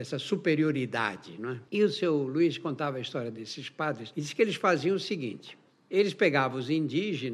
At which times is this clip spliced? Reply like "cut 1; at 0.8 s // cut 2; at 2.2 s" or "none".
cut 1; at 1.7 s